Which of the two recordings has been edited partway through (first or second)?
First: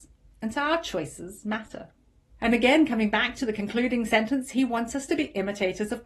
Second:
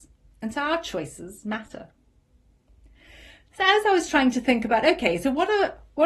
first